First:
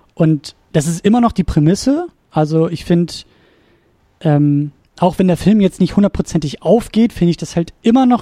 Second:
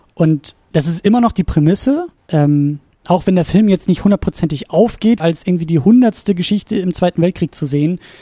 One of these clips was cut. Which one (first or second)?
second